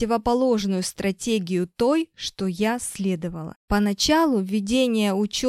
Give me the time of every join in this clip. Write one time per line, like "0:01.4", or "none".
0:03.6